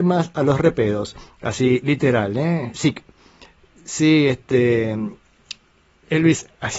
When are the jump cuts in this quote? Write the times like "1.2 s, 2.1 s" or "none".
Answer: none